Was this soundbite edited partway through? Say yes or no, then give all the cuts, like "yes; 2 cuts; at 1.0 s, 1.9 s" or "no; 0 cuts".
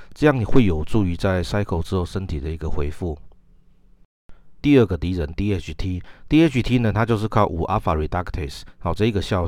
yes; 1 cut; at 4.6 s